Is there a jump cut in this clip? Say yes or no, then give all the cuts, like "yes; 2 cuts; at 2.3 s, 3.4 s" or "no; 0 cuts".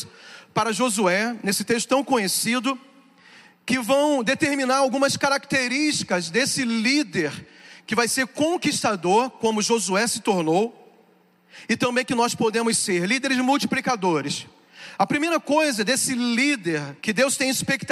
yes; 1 cut; at 17.0 s